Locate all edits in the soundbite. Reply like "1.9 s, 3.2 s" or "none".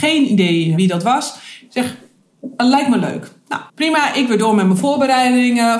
3.7 s

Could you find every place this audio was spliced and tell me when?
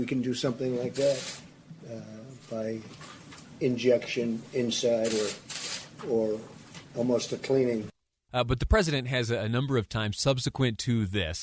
8.3 s

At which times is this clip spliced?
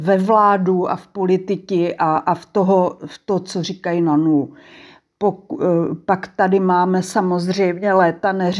none

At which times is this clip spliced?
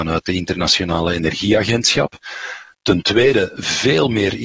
none

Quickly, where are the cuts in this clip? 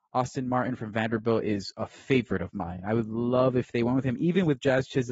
none

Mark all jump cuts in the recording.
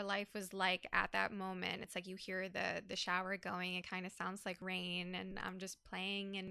none

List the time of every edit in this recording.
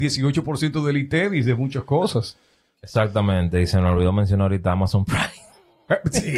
none

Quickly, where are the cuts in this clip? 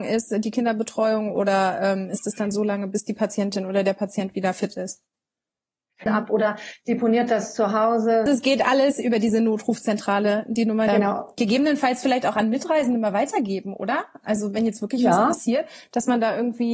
6.1 s, 8.3 s, 10.9 s

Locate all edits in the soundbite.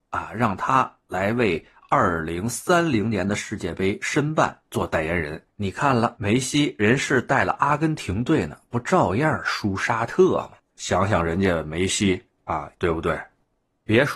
5.5 s, 10.6 s, 12.7 s

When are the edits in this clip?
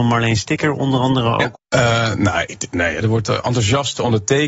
1.5 s, 3.0 s

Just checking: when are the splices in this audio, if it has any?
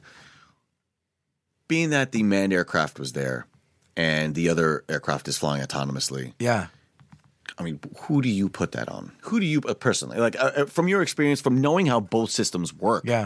9.2 s

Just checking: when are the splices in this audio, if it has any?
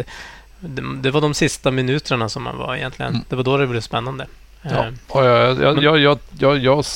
5.0 s

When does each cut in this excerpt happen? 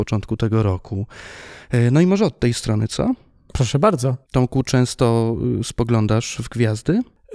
4.2 s

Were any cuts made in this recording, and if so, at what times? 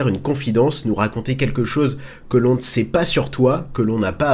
none

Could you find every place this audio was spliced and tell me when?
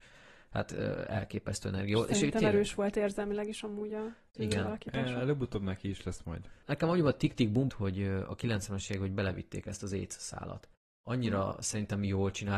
6.6 s, 7.7 s

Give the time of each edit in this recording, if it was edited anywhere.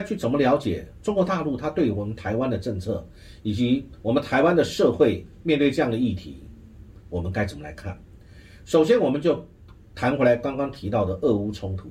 none

